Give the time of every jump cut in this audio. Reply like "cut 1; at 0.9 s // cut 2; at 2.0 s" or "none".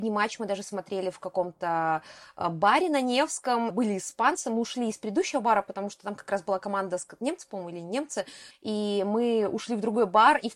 cut 1; at 3.7 s // cut 2; at 8.5 s